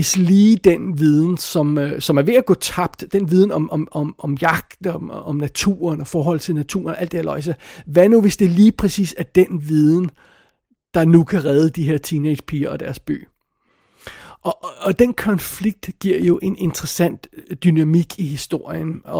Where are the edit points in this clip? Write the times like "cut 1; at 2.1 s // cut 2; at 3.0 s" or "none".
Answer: none